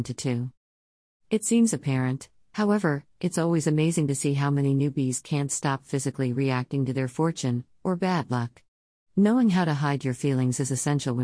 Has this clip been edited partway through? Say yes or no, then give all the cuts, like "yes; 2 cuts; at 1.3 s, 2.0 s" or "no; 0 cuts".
no; 0 cuts